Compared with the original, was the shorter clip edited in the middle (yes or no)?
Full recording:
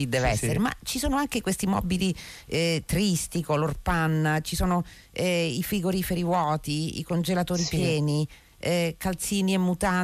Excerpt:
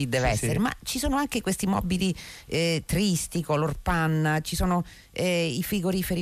no